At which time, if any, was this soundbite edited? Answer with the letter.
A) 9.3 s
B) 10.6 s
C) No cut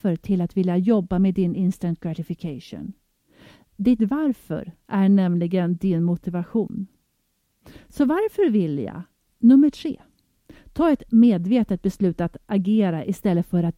A